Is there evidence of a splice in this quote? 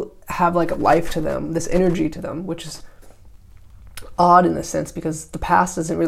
no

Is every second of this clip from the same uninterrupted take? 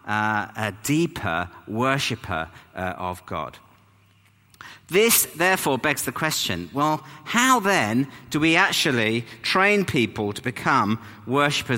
yes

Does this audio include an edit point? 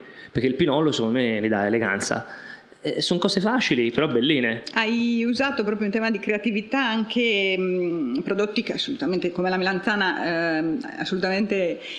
no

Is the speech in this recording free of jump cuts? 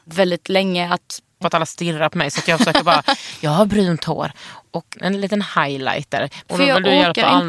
no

